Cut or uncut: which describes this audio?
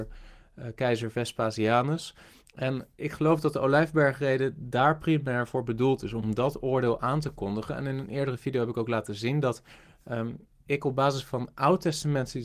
uncut